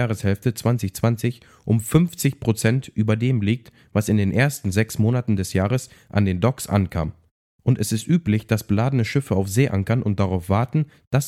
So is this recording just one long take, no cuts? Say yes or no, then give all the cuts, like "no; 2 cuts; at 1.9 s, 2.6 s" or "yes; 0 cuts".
yes; 0 cuts